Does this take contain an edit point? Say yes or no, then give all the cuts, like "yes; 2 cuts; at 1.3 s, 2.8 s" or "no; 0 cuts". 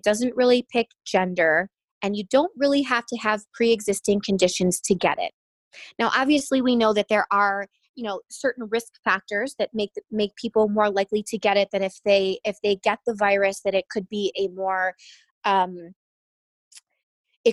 no; 0 cuts